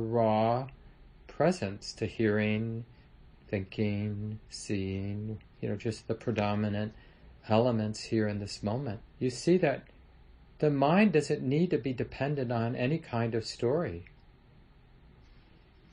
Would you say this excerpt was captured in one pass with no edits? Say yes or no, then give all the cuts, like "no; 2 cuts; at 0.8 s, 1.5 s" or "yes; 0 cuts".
no; 1 cut; at 9.1 s